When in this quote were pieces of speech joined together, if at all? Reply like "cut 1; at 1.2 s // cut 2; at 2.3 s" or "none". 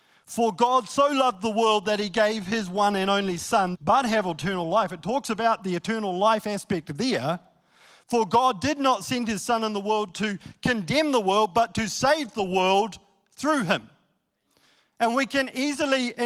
cut 1; at 3.7 s